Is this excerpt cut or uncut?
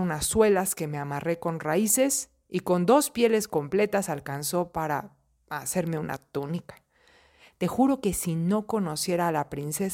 uncut